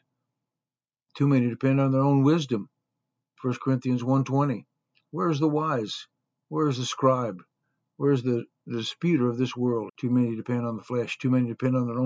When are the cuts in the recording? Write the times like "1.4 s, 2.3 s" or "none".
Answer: 9.9 s